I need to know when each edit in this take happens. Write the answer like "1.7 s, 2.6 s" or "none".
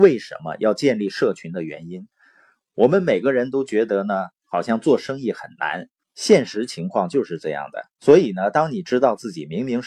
6.0 s, 8.0 s